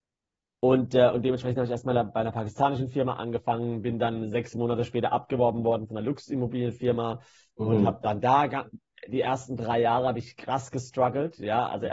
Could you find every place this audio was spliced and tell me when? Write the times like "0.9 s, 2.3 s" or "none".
none